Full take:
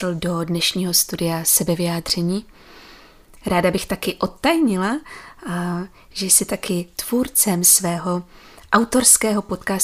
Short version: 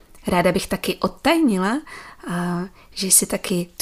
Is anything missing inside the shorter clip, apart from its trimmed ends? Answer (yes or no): no